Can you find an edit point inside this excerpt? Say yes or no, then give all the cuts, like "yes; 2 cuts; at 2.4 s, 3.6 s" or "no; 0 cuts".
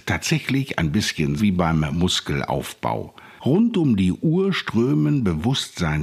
yes; 2 cuts; at 1.4 s, 3.4 s